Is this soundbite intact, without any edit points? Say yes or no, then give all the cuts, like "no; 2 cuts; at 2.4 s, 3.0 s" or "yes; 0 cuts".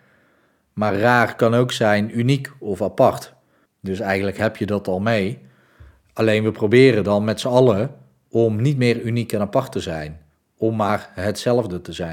no; 1 cut; at 3.7 s